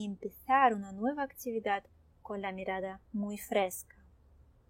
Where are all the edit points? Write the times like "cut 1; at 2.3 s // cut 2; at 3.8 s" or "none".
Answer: cut 1; at 3.1 s